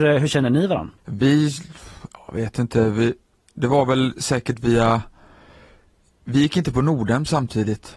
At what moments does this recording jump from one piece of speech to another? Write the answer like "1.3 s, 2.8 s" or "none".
1.0 s